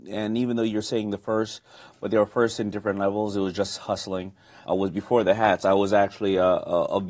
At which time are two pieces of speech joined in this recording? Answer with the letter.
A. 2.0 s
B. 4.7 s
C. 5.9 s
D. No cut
B